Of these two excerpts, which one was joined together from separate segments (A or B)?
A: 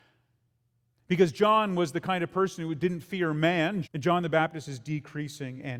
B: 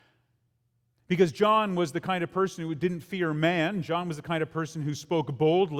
A